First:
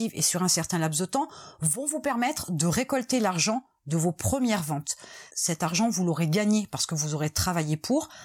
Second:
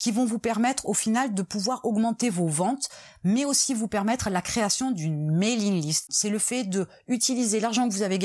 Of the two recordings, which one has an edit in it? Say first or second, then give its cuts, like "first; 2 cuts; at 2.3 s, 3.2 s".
second; 1 cut; at 6.1 s